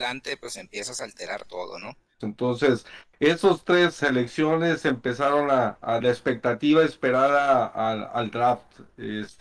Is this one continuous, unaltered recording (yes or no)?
no